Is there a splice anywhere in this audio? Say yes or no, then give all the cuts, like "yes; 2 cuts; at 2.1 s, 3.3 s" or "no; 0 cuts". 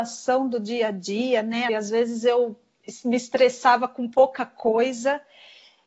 yes; 1 cut; at 1.7 s